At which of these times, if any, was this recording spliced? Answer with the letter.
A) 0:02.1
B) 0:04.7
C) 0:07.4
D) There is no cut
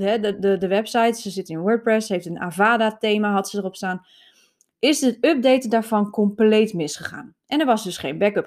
D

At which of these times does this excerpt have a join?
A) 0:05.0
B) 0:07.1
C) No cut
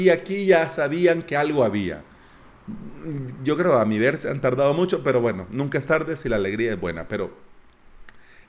C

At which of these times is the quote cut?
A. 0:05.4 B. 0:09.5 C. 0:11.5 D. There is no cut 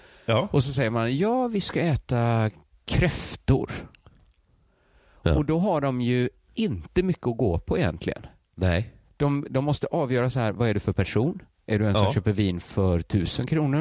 D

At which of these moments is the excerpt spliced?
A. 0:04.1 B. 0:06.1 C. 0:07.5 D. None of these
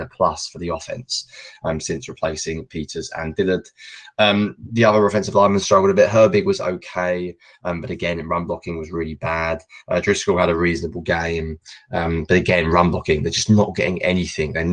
D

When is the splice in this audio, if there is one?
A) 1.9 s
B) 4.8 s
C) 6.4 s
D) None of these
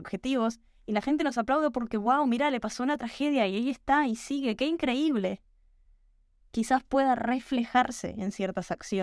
C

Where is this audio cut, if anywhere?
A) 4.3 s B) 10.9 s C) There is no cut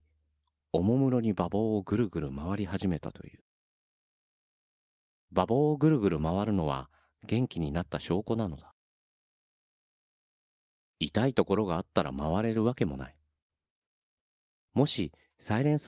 C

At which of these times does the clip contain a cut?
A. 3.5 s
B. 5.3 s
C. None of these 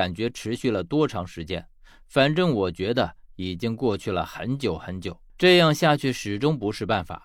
B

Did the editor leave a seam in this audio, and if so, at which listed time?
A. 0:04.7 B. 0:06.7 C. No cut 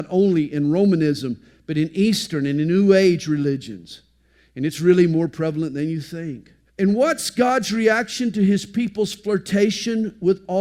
B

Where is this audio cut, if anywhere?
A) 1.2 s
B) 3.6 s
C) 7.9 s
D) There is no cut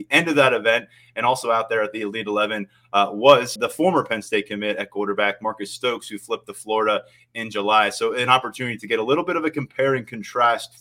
B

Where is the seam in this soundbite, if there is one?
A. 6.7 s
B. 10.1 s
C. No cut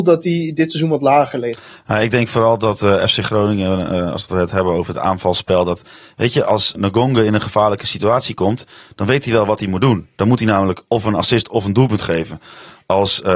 A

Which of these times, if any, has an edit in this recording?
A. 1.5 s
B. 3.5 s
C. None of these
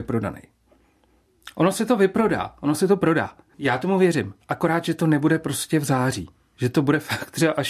B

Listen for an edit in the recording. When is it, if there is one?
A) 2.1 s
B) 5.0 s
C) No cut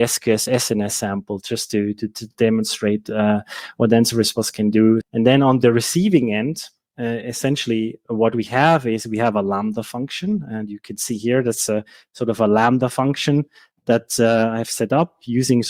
B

